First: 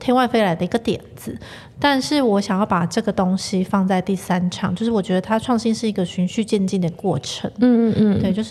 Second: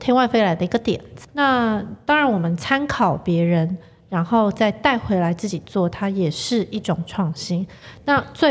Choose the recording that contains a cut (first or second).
second